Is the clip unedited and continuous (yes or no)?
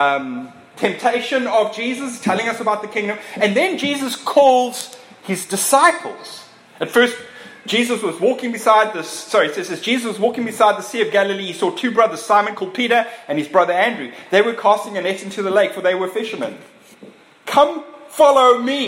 yes